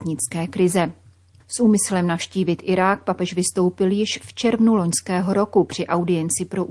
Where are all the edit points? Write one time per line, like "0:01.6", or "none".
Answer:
0:01.4